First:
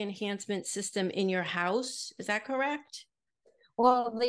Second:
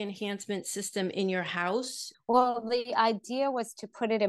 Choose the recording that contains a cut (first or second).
second